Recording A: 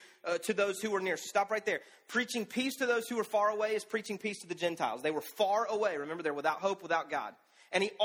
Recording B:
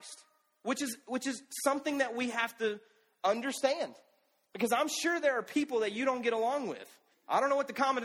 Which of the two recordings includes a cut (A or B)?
B